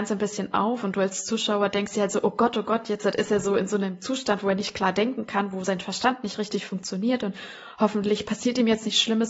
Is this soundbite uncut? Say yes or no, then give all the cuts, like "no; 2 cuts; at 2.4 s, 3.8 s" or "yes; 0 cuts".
yes; 0 cuts